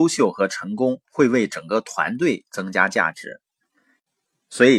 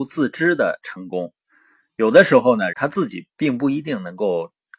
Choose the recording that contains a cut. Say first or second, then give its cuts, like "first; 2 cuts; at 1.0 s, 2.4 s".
second; 1 cut; at 2.7 s